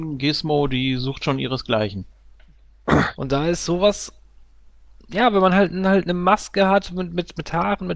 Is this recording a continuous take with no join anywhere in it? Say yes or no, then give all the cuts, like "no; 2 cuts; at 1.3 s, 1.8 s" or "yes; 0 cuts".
no; 1 cut; at 3.2 s